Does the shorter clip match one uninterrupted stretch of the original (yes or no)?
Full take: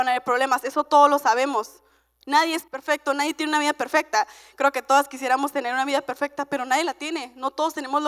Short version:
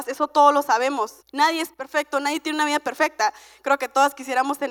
no